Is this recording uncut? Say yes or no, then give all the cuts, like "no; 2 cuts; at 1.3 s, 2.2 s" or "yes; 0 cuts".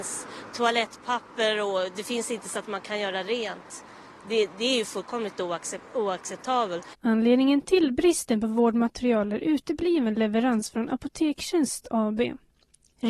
yes; 0 cuts